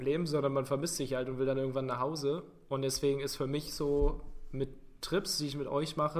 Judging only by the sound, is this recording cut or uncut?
uncut